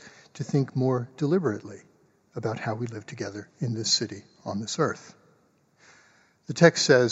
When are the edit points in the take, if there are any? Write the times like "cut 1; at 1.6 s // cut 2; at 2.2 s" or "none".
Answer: none